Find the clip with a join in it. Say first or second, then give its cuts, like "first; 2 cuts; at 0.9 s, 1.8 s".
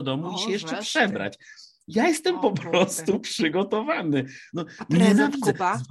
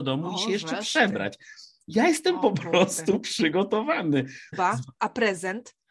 second; 1 cut; at 4.5 s